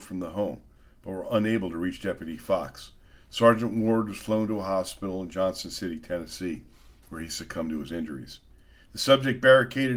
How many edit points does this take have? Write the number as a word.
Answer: zero